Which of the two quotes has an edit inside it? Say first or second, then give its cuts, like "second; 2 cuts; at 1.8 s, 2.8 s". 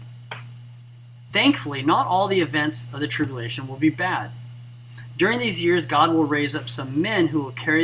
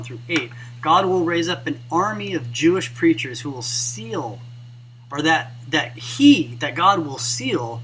first; 1 cut; at 1.3 s